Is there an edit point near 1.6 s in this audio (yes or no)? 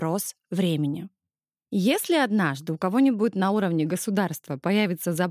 no